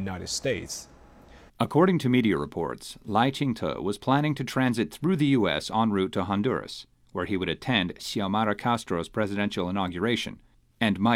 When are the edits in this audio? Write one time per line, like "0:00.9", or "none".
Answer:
0:01.5